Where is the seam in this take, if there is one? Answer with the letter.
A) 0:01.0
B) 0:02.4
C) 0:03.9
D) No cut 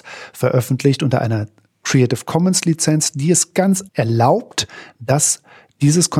C